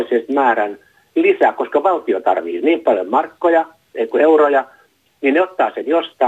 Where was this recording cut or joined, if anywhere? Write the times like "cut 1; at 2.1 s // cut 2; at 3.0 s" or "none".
none

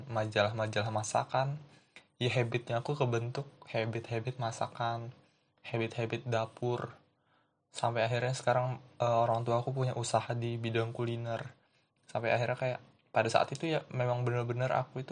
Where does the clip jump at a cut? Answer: none

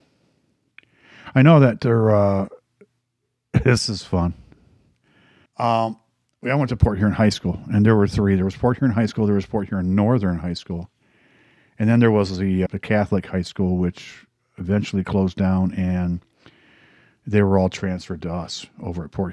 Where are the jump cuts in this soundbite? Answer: cut 1; at 5.5 s // cut 2; at 12.7 s

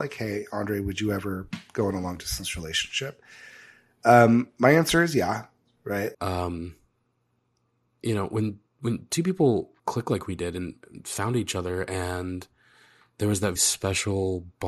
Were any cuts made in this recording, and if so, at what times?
cut 1; at 6.1 s // cut 2; at 9.8 s // cut 3; at 13.6 s

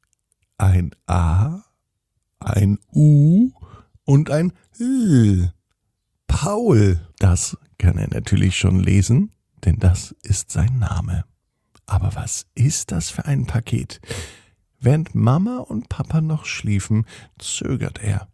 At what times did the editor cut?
none

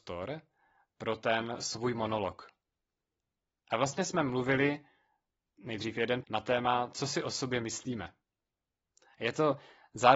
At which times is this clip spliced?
cut 1; at 6.2 s

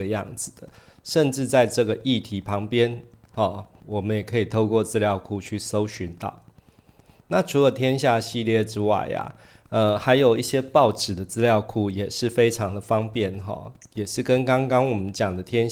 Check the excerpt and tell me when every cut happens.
cut 1; at 3.8 s

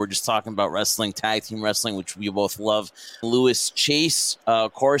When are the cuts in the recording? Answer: cut 1; at 3.2 s

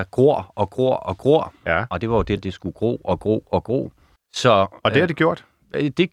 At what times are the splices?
cut 1; at 2.4 s

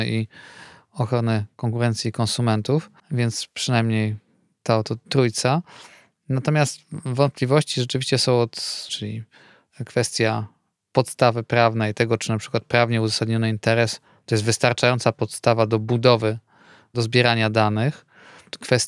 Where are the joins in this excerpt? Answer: cut 1; at 3.0 s // cut 2; at 8.9 s

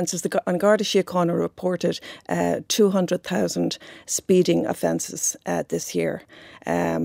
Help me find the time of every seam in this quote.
none

